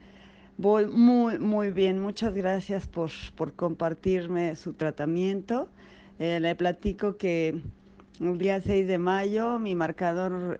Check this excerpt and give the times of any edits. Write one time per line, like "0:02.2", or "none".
none